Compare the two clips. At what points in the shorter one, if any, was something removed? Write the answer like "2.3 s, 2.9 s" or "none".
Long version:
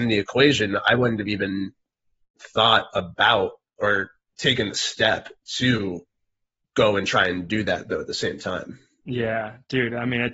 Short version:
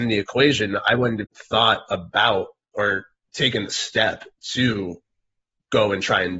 1.2 s